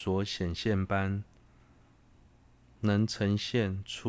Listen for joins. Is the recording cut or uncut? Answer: uncut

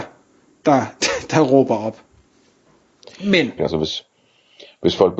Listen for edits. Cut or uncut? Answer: cut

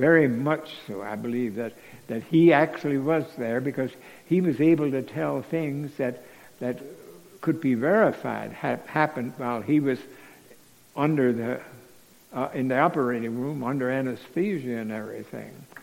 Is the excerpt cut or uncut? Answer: uncut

